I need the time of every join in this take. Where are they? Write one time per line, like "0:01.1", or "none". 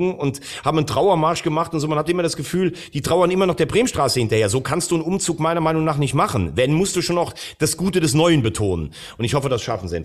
none

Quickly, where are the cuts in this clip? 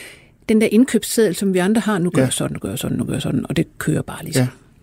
none

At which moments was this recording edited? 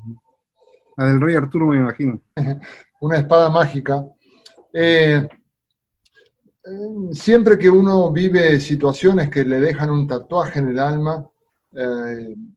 0:02.4

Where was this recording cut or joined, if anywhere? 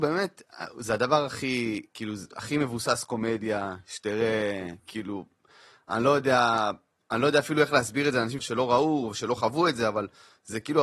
0:08.4

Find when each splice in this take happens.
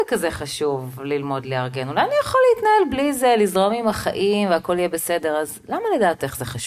none

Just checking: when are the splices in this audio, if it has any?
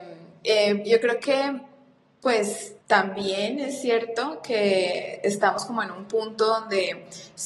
0:02.8

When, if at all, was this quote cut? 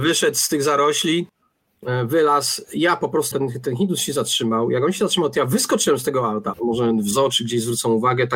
0:03.3
0:06.5

